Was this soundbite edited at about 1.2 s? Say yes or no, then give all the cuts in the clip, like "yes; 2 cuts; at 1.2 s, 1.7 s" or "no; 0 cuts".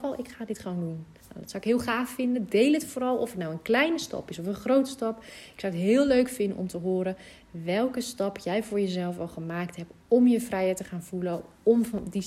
yes; 1 cut; at 1.2 s